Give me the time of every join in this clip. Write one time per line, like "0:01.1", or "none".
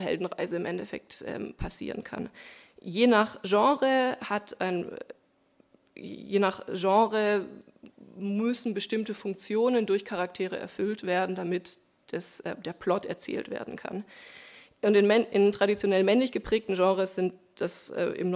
none